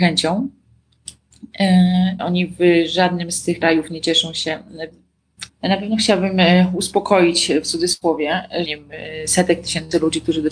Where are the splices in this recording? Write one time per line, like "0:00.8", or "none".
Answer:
0:02.2
0:05.5
0:08.6